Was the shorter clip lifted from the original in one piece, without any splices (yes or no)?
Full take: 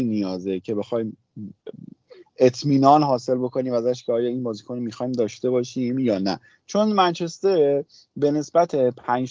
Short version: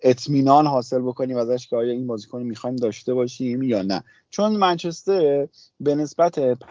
yes